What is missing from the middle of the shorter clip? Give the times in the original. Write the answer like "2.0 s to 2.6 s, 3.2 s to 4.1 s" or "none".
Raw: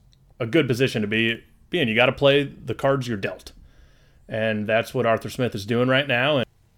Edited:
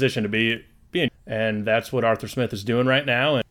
1.9 s to 4.1 s